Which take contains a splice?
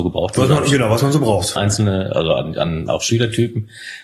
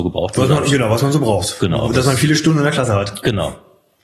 first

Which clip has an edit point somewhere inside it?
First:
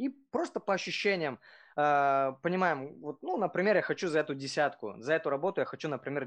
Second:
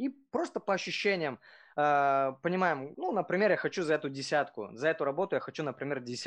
second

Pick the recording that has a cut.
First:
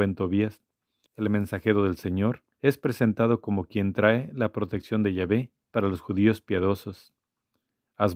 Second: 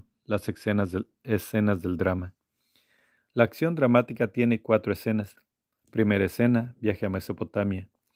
first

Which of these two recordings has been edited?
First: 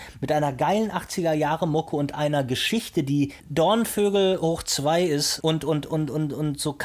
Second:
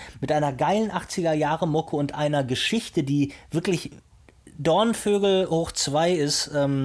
first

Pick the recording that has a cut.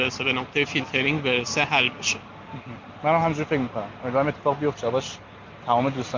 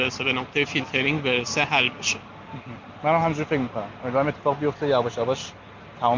first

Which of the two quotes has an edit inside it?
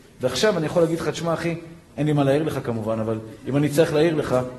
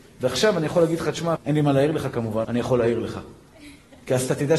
second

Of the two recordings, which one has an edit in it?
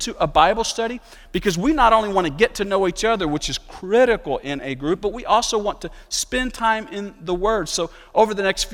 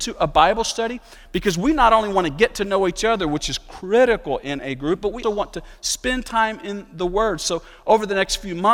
second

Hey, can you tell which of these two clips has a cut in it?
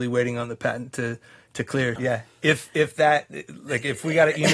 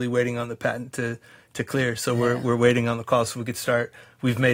first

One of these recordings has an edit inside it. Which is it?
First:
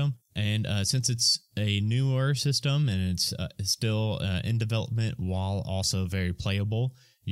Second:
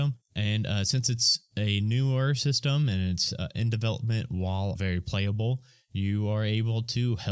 second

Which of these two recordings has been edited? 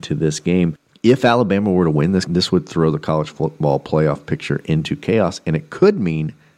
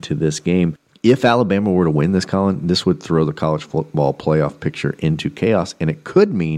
first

